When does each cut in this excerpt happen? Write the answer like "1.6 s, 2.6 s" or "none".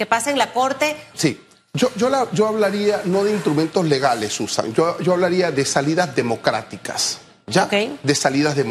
1.1 s